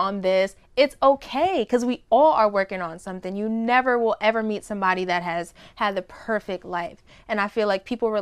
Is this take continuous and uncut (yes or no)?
yes